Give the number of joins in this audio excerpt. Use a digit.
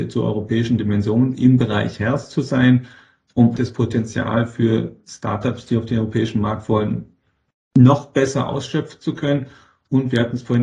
1